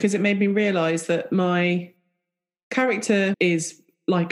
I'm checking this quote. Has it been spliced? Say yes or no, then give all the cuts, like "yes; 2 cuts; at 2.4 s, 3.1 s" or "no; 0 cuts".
yes; 1 cut; at 3.3 s